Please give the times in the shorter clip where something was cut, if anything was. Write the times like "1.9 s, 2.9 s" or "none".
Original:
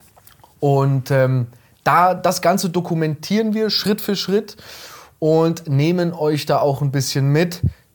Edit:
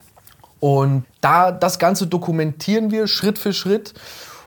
1.0 s